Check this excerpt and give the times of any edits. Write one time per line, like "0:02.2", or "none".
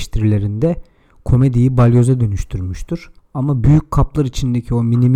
0:03.2